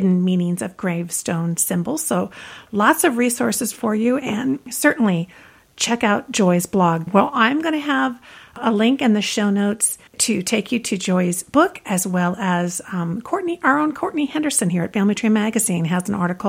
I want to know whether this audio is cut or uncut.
cut